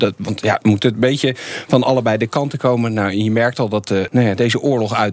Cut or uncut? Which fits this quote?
cut